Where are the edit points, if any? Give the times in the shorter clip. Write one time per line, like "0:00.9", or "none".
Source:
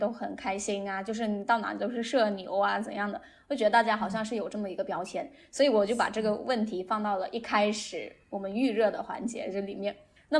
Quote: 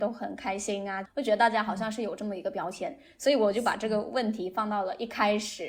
0:01.0